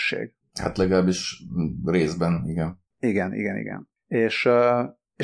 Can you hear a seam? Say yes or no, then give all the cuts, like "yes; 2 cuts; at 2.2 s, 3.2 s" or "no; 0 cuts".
no; 0 cuts